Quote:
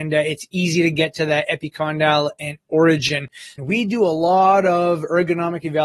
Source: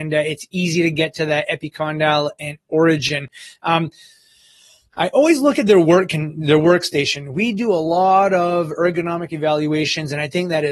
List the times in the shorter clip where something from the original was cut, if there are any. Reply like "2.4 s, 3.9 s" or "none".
3.6 s